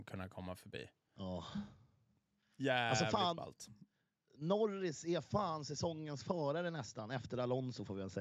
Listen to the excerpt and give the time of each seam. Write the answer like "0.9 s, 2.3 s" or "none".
1.2 s